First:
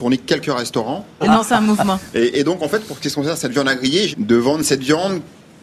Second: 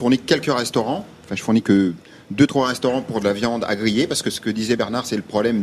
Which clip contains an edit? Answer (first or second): first